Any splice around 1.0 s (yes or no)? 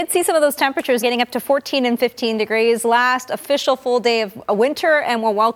yes